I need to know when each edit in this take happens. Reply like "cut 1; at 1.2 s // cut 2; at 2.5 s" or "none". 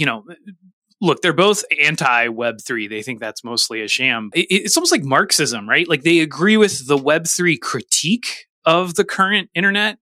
cut 1; at 4.3 s